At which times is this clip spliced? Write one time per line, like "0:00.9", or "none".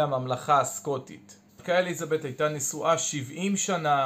0:01.5

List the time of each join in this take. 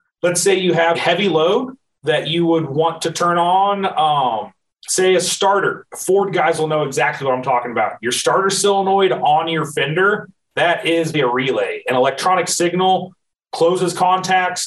0:00.9
0:11.1

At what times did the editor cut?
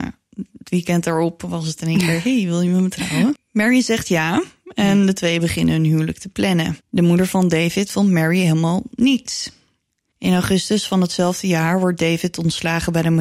0:03.3
0:06.8
0:10.1

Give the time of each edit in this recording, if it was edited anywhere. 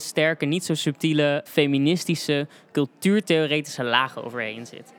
0:01.5

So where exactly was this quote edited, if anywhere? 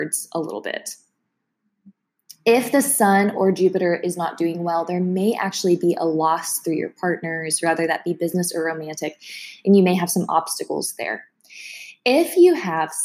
none

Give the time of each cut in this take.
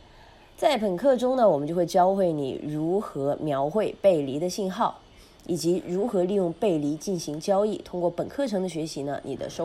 none

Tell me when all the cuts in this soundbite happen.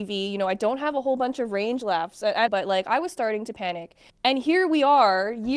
0:02.5
0:04.1

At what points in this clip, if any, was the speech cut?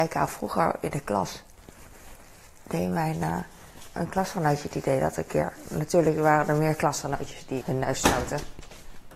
0:07.6

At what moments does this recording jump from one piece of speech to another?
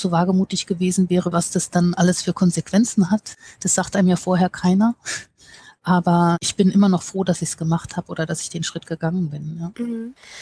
0:01.3

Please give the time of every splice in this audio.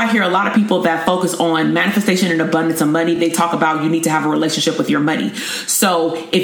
none

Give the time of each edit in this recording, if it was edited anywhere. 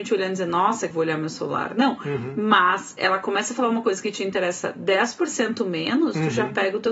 0:00.9

